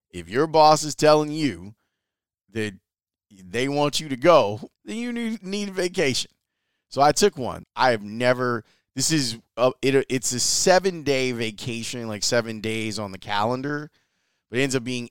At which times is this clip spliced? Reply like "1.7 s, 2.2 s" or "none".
4.7 s, 7.6 s